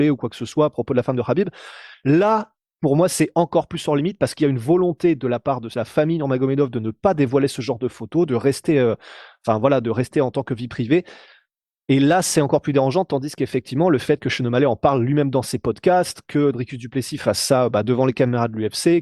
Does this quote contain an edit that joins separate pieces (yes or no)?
no